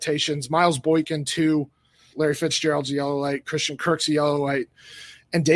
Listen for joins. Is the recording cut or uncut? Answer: cut